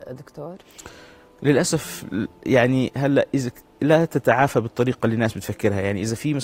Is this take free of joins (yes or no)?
yes